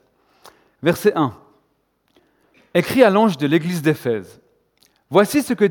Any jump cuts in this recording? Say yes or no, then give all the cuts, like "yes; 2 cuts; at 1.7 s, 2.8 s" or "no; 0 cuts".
no; 0 cuts